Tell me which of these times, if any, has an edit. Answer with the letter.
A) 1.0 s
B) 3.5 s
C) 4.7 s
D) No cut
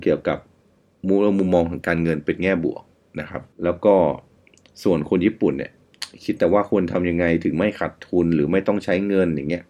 B